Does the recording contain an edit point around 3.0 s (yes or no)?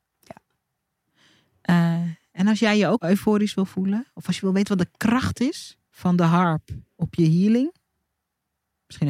yes